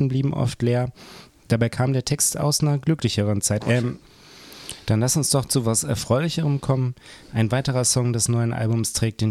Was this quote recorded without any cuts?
no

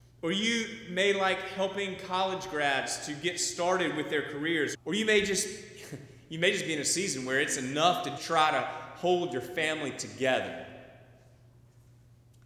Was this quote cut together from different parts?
yes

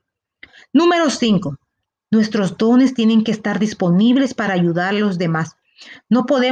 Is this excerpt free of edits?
no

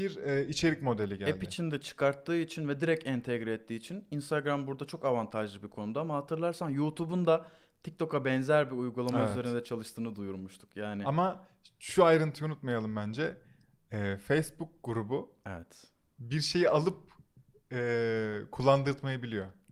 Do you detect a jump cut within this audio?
no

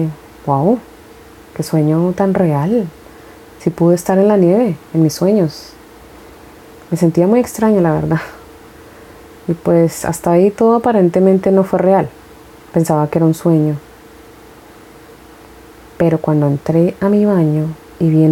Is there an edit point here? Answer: no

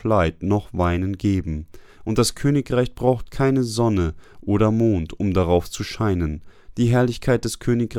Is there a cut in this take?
yes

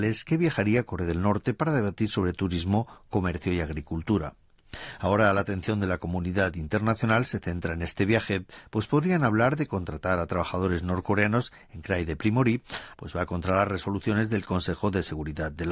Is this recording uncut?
no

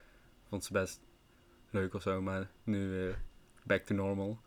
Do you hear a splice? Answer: no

